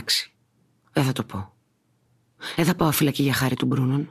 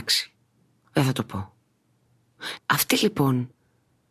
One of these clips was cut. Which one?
second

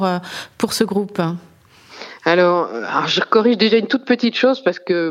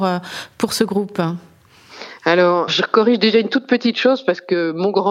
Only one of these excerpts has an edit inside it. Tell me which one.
second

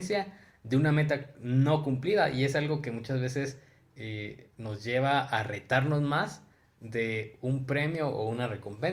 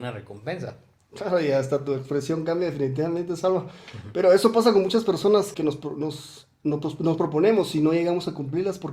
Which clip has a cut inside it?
second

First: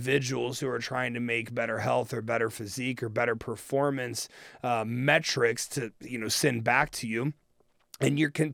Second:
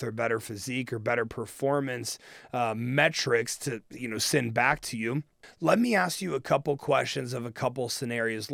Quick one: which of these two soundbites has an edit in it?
second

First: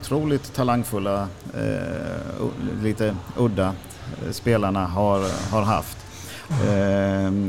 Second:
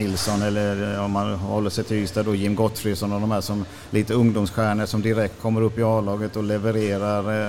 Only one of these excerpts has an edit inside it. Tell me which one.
first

